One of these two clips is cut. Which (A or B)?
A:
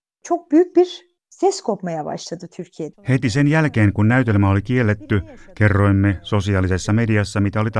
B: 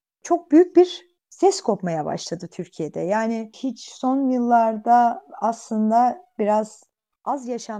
A